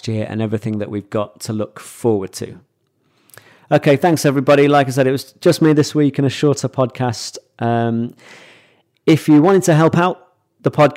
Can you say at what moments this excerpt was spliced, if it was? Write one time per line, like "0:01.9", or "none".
none